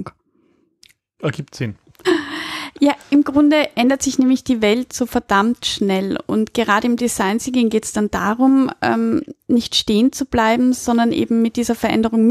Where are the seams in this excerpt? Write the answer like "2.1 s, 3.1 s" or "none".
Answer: 2.0 s